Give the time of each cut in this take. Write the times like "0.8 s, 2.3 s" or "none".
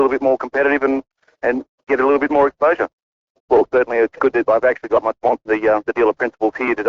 3.4 s, 5.5 s